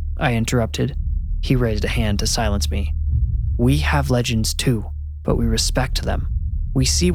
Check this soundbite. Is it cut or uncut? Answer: uncut